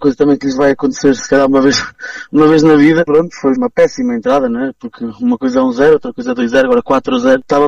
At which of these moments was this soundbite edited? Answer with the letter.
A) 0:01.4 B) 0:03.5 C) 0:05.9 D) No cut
B